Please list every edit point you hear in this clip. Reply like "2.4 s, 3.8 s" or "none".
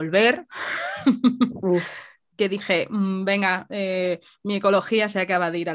none